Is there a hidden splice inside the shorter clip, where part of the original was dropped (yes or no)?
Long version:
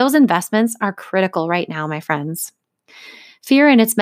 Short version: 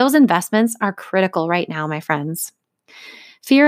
no